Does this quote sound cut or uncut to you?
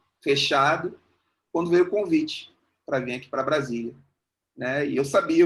uncut